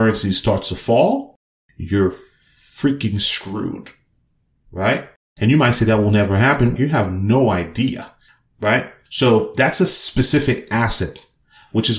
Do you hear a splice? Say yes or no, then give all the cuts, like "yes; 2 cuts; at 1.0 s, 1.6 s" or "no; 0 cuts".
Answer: yes; 1 cut; at 6.8 s